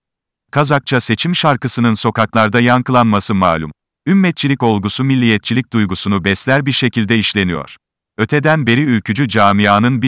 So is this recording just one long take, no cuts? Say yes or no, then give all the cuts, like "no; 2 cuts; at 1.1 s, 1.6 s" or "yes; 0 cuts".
no; 1 cut; at 3.9 s